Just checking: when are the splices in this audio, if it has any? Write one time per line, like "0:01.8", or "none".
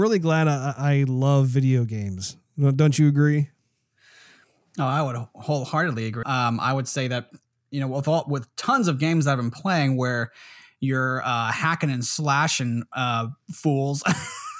0:06.2